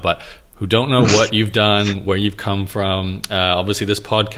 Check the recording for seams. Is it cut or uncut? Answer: uncut